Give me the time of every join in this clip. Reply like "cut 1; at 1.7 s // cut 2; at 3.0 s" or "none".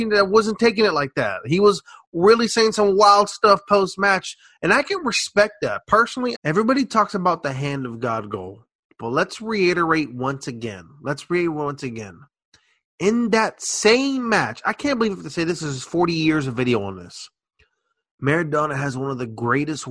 cut 1; at 6.3 s